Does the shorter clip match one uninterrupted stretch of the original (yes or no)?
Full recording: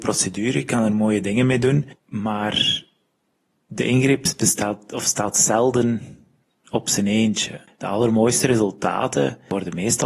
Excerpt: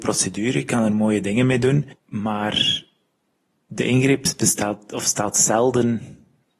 yes